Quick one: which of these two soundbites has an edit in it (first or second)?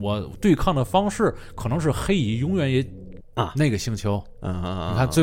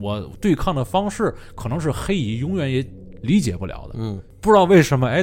first